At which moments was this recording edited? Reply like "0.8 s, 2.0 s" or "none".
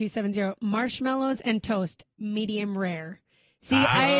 none